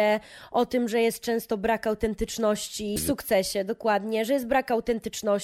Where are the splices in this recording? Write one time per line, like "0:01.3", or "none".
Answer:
0:03.0